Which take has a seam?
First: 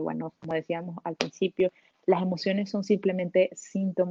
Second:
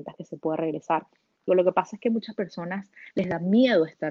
second; 1 cut; at 1.5 s

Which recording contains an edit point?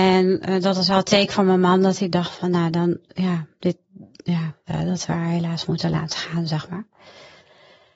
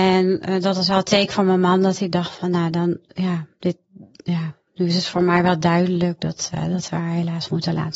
first; 1 cut; at 4.7 s

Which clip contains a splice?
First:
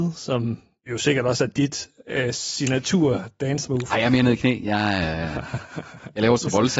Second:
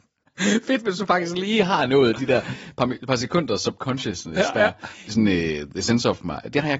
second; 1 cut; at 5.1 s

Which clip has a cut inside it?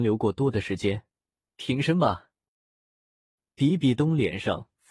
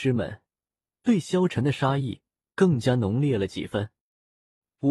first; 1 cut; at 1.5 s

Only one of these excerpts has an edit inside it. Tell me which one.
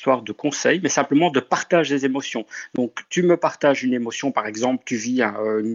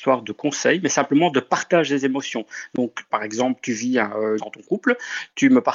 second; 2 cuts; at 3.1 s, 4.4 s

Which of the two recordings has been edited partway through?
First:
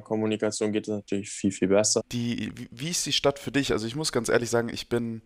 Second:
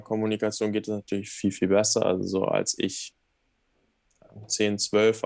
first; 1 cut; at 2.0 s

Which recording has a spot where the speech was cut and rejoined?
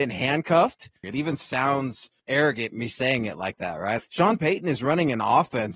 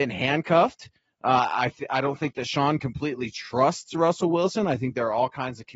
first; 3 cuts; at 1.0 s, 2.2 s, 4.0 s

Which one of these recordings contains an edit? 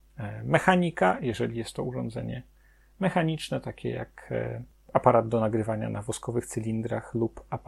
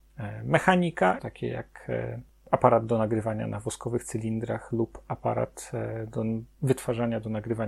second; 1 cut; at 1.2 s

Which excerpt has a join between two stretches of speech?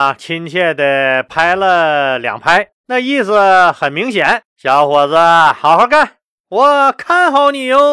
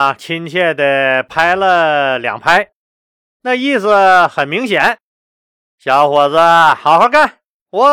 first; 2 cuts; at 2.7 s, 4.5 s

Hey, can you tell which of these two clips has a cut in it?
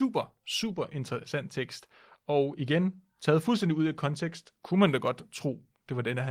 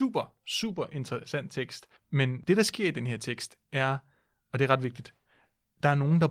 second; 1 cut; at 2.0 s

